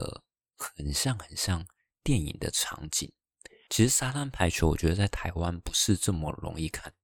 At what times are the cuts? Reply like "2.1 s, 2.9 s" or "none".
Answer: 3.7 s

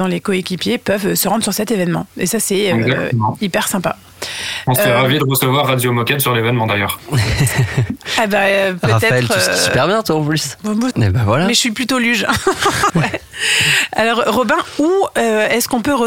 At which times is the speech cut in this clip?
10.9 s, 12.9 s

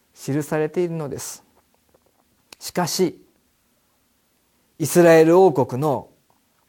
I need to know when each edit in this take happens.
none

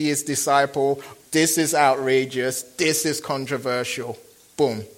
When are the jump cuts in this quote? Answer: 1.2 s, 2.6 s

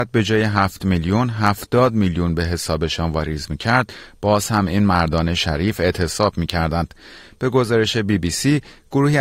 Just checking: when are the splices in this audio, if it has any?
none

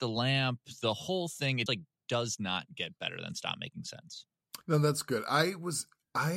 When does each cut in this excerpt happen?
1.7 s, 4.6 s

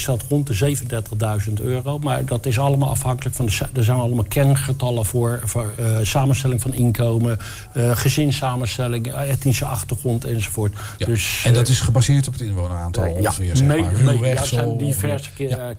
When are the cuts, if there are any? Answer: 11.0 s

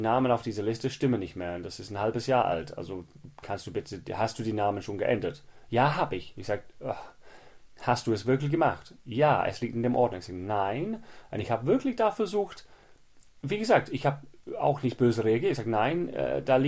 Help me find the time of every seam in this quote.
none

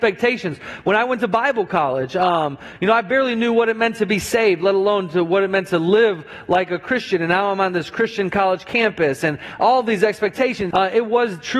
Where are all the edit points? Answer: 10.7 s

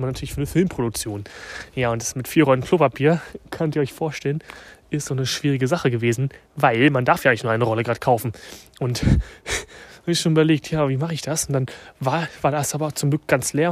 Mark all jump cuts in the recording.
none

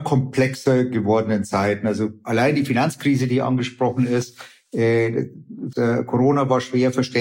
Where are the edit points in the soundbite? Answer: 5.7 s

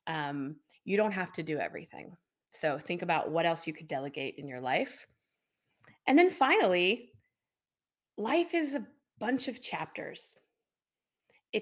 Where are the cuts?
none

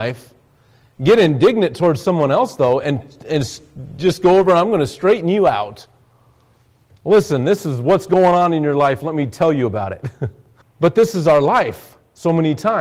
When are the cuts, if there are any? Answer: 10.6 s

